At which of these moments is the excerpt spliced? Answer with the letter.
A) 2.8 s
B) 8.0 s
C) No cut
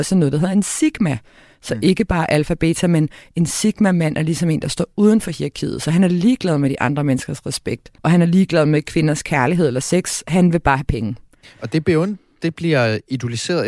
B